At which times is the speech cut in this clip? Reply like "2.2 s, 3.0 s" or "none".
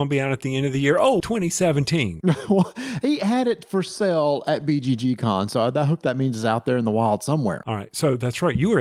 1.2 s